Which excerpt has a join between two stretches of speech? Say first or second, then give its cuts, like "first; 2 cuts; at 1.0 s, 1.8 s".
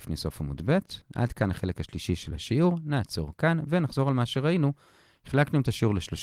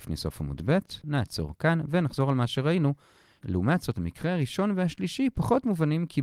second; 2 cuts; at 1.0 s, 3.4 s